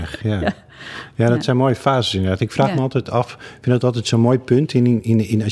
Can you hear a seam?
no; 0 cuts

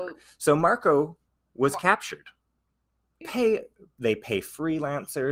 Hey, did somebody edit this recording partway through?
yes; 1 cut; at 3.2 s

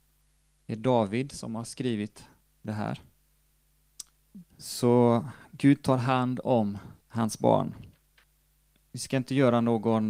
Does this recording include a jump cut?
yes; 2 cuts; at 4.4 s, 7.0 s

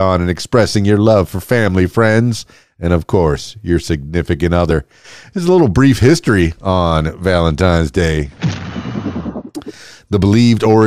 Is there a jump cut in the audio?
no; 0 cuts

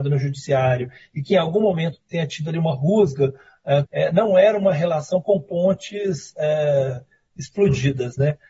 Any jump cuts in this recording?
yes; 2 cuts; at 2.0 s, 3.8 s

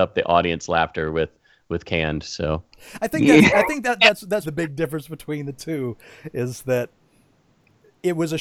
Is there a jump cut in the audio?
yes; 1 cut; at 4.4 s

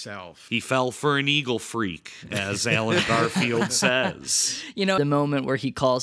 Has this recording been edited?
yes; 1 cut; at 5.0 s

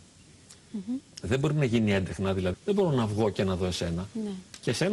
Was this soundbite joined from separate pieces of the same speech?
yes; 2 cuts; at 1.0 s, 2.5 s

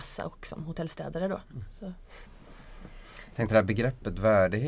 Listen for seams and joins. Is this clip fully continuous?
no; 1 cut; at 2.2 s

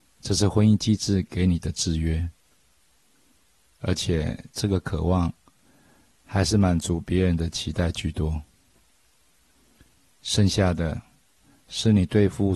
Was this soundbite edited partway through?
yes; 1 cut; at 3.7 s

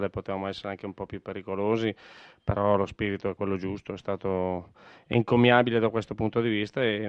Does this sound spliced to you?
no; 0 cuts

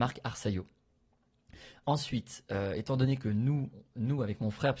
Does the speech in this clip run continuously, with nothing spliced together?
yes; 0 cuts

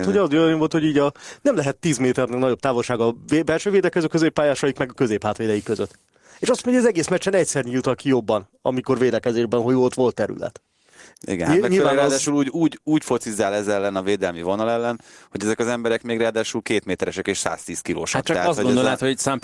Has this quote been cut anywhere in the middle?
yes; 1 cut; at 11.1 s

